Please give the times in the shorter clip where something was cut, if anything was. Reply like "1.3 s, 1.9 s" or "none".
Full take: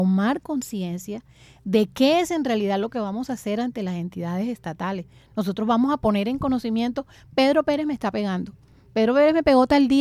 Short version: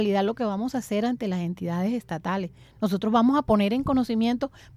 none